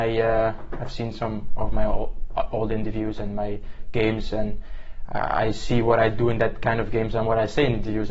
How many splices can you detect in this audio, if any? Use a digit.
0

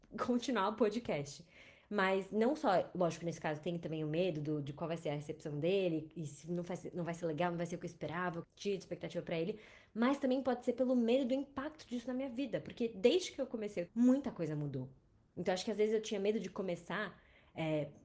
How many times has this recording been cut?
2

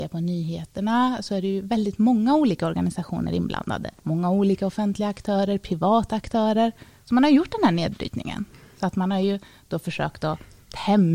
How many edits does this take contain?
1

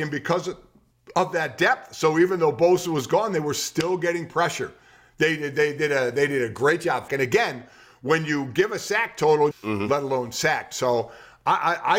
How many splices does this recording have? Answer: 2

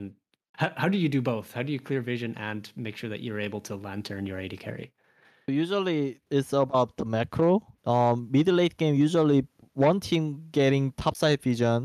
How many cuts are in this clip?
1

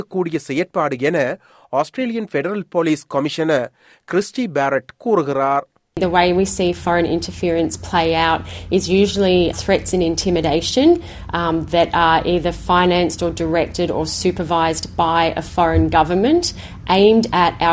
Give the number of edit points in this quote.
1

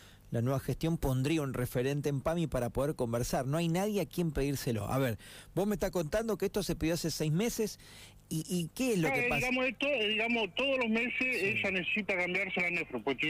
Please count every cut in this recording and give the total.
0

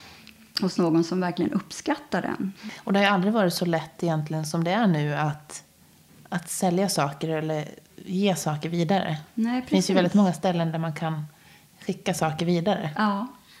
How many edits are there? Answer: 0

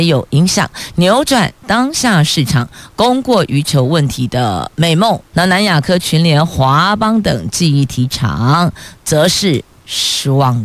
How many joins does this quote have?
1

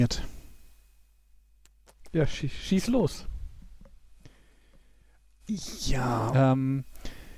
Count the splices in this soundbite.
1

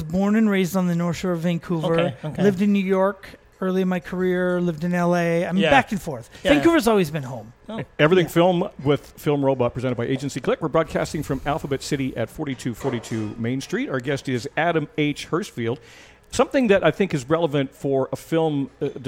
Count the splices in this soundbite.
0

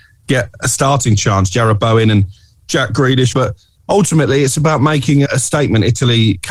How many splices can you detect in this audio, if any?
2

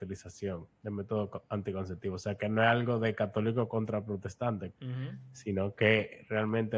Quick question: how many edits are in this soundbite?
1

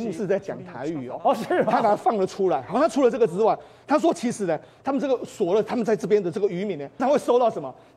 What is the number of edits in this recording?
1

